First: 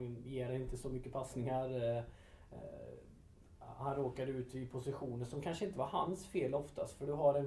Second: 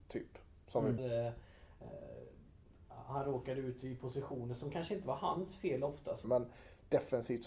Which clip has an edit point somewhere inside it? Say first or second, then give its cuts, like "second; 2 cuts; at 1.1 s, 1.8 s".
second; 2 cuts; at 1.0 s, 6.2 s